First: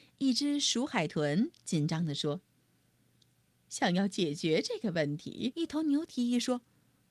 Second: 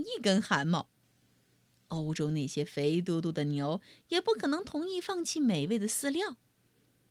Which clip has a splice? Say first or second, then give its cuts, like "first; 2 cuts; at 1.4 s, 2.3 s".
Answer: first; 1 cut; at 5.5 s